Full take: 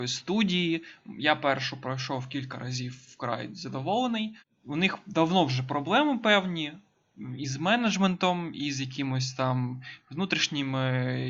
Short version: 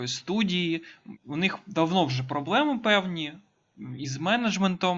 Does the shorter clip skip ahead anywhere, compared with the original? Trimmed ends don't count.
yes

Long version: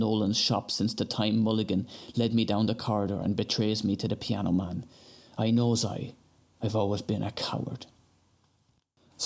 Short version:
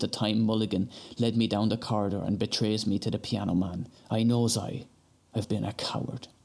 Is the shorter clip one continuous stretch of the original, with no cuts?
no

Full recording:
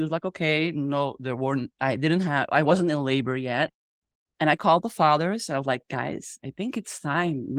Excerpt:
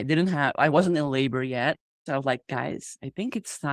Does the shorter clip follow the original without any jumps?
no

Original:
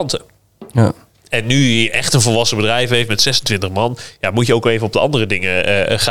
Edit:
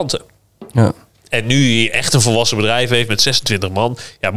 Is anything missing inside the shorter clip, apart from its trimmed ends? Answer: no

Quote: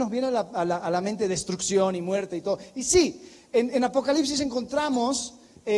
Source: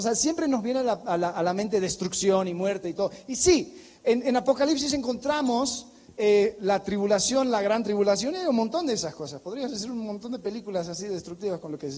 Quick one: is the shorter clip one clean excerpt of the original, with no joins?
yes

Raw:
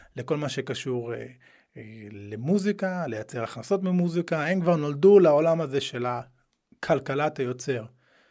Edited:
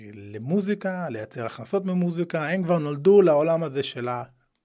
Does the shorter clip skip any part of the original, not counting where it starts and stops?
no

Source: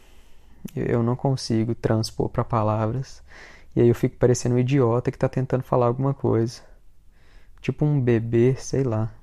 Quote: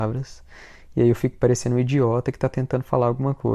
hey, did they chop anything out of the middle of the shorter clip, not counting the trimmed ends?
no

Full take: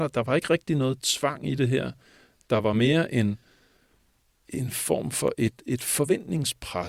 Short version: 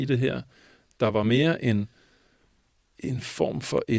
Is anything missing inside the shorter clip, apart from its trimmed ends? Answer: no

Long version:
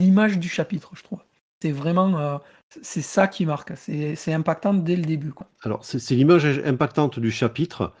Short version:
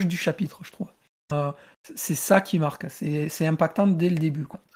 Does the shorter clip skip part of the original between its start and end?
yes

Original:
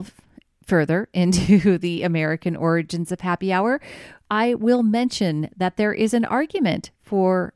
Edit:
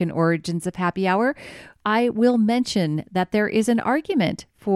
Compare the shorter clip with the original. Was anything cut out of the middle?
no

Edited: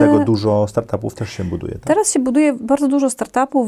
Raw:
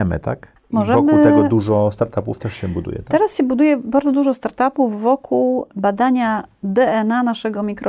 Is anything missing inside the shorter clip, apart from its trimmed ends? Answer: no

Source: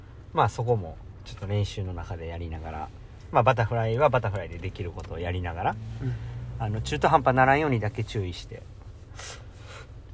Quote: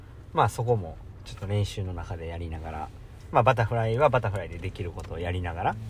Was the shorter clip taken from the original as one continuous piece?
yes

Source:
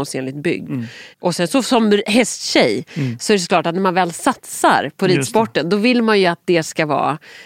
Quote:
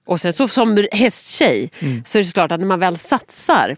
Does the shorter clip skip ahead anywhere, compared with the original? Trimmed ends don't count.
no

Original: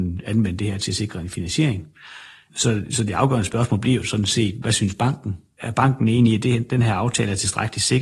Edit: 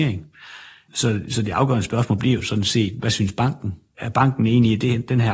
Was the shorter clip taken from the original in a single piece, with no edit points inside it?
yes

